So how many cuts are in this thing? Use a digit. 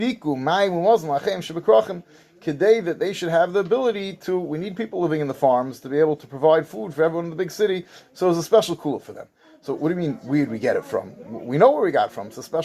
0